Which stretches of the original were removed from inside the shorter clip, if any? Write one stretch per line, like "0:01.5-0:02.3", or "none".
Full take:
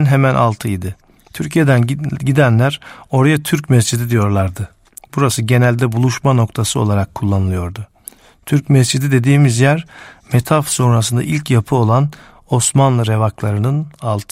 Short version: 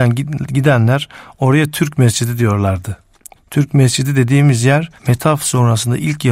0:05.1-0:08.3
0:09.9-0:10.2